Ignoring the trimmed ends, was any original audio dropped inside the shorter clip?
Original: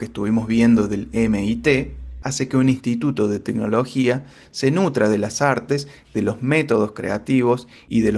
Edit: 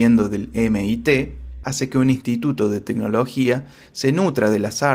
no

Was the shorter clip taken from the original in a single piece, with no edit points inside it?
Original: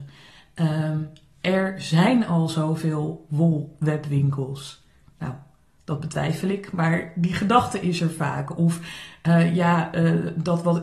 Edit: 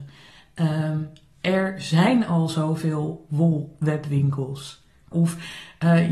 no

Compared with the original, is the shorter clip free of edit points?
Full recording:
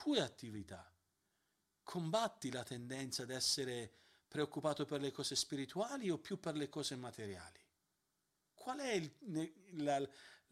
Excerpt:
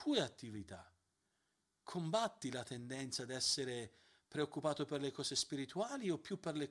yes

